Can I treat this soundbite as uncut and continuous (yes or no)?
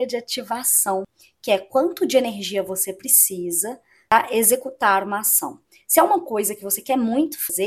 yes